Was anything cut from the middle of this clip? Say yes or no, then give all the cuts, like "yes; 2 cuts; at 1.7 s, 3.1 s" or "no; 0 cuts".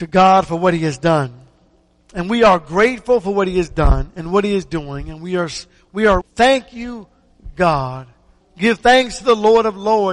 yes; 2 cuts; at 6.2 s, 8.4 s